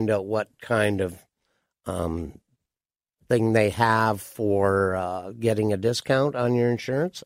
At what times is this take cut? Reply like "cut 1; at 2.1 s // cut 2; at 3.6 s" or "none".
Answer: none